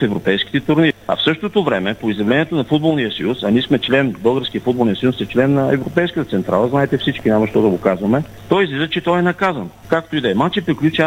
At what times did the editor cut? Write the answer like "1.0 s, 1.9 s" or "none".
9.8 s